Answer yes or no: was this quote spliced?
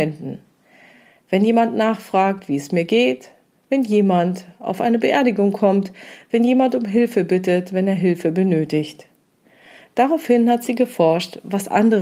no